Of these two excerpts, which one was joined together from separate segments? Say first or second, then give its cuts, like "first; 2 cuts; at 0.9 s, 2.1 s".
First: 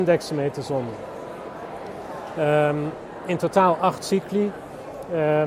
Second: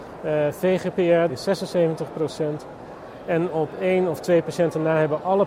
second; 1 cut; at 1.3 s